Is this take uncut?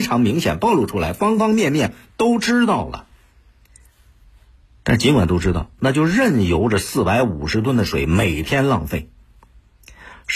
yes; 0 cuts

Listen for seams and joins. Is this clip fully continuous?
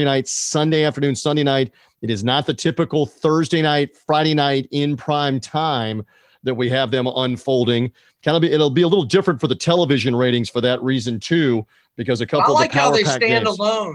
yes; 0 cuts

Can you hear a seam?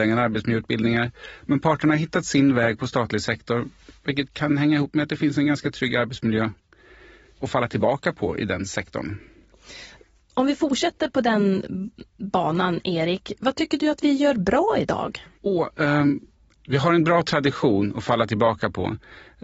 no; 0 cuts

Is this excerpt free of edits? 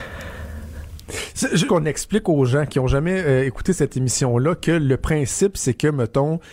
no; 1 cut; at 1.7 s

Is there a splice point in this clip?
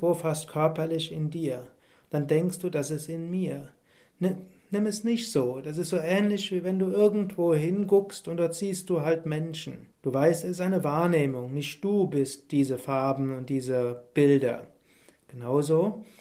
yes; 1 cut; at 9.9 s

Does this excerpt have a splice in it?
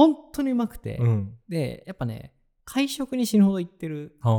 no; 0 cuts

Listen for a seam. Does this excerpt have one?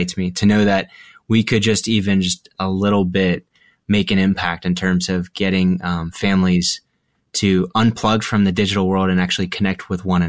no; 0 cuts

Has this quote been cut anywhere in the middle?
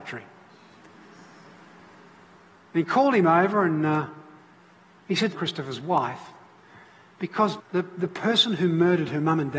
yes; 2 cuts; at 5.3 s, 7.6 s

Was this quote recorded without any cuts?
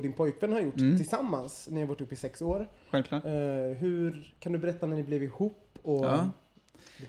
yes; 0 cuts

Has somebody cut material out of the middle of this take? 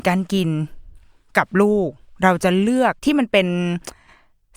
yes; 1 cut; at 3.0 s

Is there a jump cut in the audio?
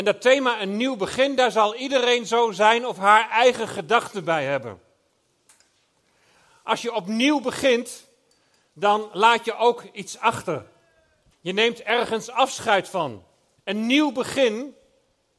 yes; 2 cuts; at 11.3 s, 13.6 s

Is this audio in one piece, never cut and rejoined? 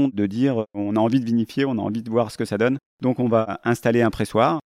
no; 1 cut; at 2.9 s

